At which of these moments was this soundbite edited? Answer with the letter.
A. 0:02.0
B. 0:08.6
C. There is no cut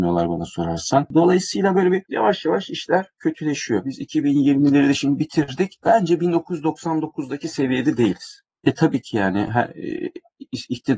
B